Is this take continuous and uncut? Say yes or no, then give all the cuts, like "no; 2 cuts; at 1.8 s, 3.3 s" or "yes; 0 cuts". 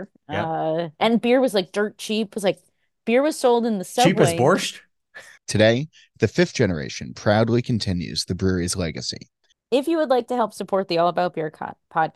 no; 2 cuts; at 5.4 s, 9.5 s